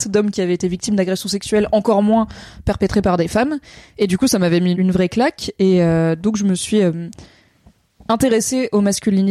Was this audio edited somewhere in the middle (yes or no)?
yes